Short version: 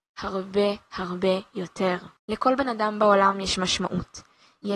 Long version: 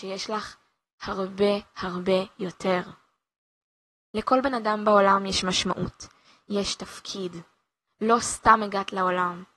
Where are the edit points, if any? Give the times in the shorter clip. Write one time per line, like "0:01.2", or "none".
0:02.2